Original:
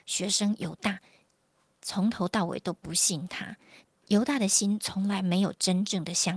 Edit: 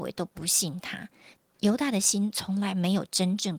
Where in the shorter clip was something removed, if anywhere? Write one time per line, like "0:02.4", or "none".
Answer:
none